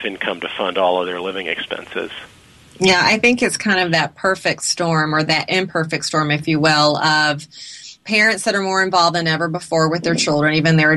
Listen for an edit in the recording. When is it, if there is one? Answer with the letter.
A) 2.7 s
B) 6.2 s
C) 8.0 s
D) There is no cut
C